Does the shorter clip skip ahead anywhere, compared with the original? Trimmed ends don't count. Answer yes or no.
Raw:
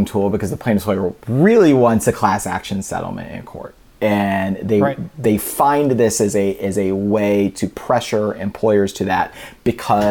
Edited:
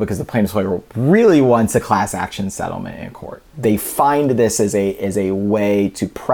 yes